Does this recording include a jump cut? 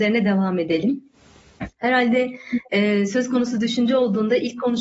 no; 0 cuts

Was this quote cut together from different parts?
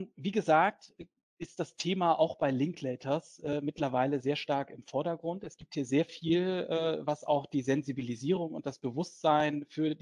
no; 0 cuts

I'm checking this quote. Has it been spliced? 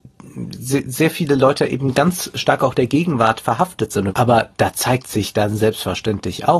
yes; 1 cut; at 4.1 s

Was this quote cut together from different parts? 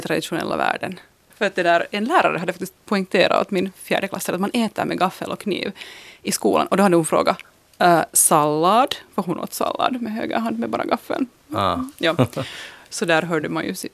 yes; 1 cut; at 1.3 s

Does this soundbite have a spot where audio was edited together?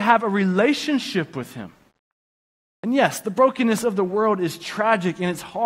no; 0 cuts

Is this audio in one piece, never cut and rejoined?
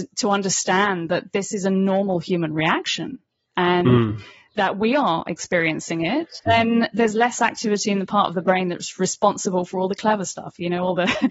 no; 1 cut; at 6.5 s

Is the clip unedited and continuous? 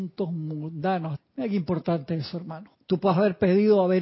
no; 2 cuts; at 1.2 s, 2.7 s

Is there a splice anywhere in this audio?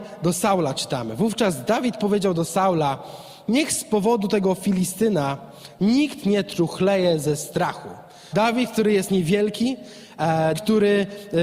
yes; 2 cuts; at 8.3 s, 10.5 s

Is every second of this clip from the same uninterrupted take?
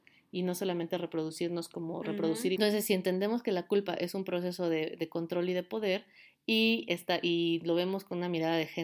no; 1 cut; at 2.6 s

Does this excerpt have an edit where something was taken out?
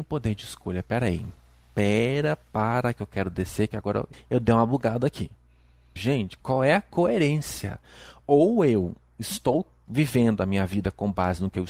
yes; 2 cuts; at 4.1 s, 6.0 s

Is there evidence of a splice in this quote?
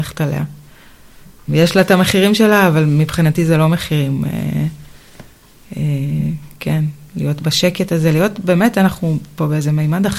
yes; 1 cut; at 1.5 s

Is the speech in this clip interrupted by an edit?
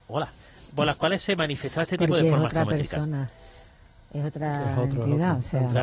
no; 0 cuts

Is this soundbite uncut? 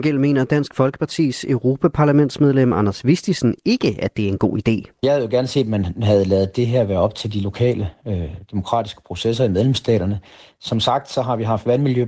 yes; 0 cuts

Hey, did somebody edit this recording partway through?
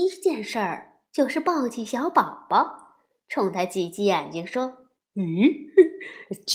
no; 0 cuts

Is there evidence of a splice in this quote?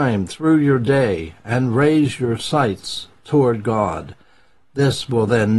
no; 0 cuts

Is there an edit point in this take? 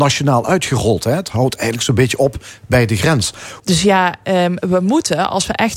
yes; 1 cut; at 3.6 s

